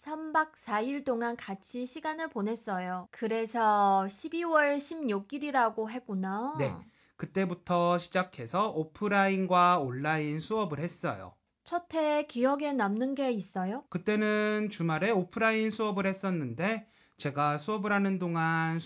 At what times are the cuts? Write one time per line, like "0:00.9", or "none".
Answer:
0:03.1
0:13.9